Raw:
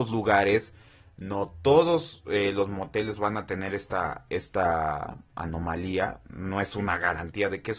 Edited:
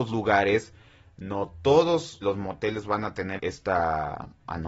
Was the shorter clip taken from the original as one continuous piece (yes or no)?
no